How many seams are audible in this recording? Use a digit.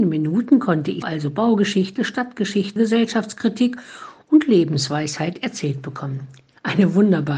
2